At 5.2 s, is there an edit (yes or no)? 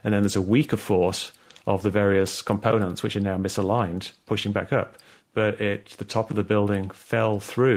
yes